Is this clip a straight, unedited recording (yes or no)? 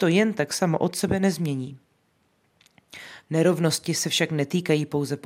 no